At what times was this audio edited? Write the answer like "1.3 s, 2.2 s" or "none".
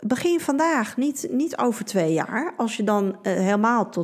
none